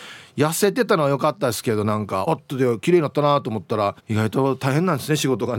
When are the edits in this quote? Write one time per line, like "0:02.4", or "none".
0:02.3
0:04.0